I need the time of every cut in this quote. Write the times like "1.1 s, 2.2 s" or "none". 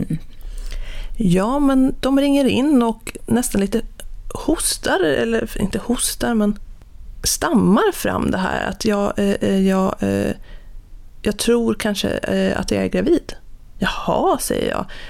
none